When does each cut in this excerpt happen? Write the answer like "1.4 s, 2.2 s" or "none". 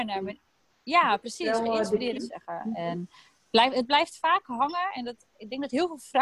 2.2 s